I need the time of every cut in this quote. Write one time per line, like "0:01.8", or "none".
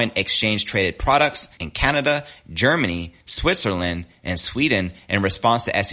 0:01.6